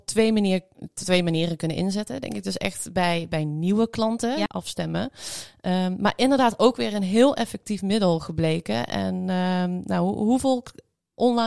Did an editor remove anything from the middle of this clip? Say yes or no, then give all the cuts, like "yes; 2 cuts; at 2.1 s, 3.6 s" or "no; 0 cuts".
yes; 1 cut; at 4.5 s